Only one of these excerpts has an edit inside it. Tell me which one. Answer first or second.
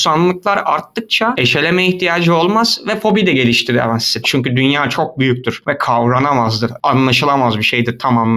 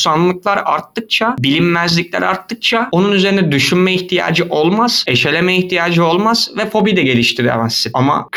first